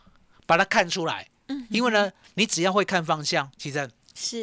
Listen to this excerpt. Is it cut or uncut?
uncut